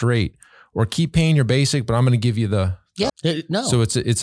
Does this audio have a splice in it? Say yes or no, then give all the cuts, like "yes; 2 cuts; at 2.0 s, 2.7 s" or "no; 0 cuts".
yes; 1 cut; at 3.1 s